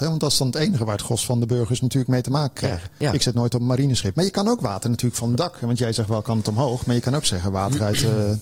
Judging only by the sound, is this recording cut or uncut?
cut